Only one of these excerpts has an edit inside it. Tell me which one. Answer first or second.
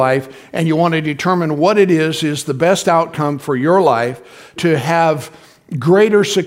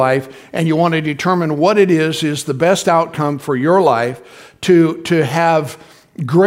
first